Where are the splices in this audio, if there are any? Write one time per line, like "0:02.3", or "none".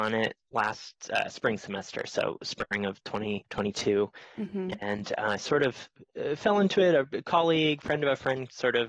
none